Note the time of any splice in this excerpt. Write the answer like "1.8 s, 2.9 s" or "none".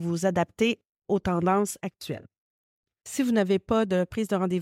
3.0 s